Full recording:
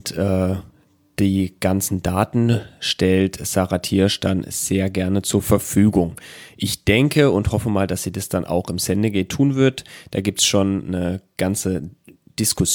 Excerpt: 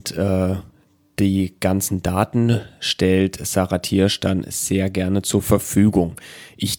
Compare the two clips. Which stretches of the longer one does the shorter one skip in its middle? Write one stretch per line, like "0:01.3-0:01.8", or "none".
none